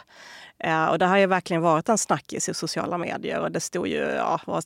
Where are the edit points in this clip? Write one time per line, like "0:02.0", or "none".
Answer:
none